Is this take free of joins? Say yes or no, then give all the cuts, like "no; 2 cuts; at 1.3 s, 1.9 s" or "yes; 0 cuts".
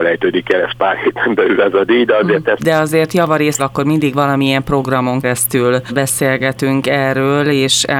no; 3 cuts; at 2.6 s, 3.6 s, 5.2 s